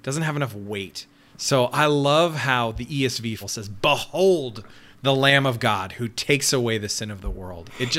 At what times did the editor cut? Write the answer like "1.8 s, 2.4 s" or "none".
3.4 s

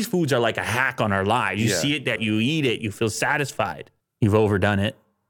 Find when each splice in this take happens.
2.2 s, 4.0 s

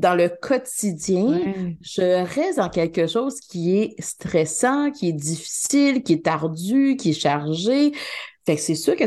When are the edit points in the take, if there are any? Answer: none

